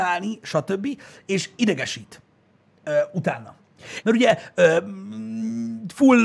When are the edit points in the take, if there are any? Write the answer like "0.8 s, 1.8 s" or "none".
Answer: 4.0 s